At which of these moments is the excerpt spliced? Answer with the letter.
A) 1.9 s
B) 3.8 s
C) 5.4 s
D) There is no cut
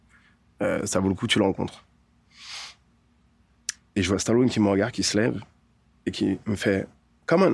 D